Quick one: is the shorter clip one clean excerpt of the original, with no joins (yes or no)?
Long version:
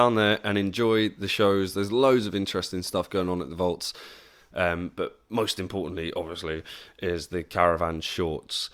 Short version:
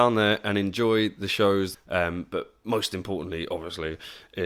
no